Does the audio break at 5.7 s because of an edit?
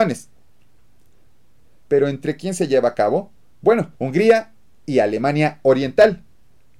no; 2 cuts; at 1.8 s, 4.0 s

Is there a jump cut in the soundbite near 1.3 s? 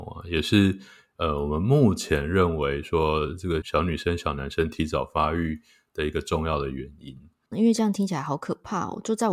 no; 2 cuts; at 3.6 s, 7.5 s

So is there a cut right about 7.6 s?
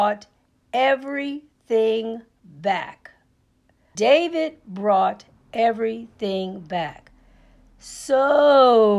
no; 1 cut; at 3.9 s

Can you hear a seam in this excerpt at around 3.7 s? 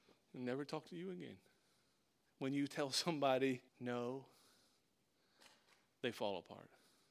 yes; 2 cuts; at 2.3 s, 3.7 s

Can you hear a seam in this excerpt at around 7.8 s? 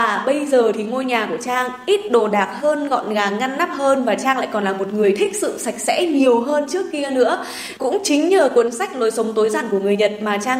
yes; 1 cut; at 7.8 s

